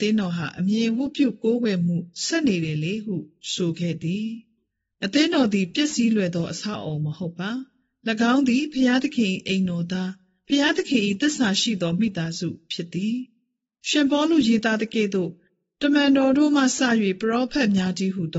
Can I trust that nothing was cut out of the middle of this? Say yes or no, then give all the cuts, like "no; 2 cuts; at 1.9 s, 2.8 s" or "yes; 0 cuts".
yes; 0 cuts